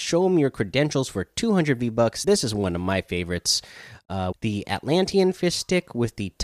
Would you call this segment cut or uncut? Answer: cut